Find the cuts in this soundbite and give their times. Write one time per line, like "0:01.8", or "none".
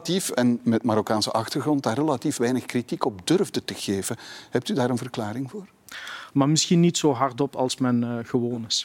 0:06.3